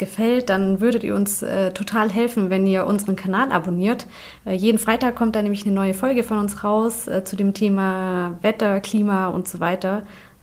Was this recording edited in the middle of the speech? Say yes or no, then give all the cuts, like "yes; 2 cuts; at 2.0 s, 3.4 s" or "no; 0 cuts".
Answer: no; 0 cuts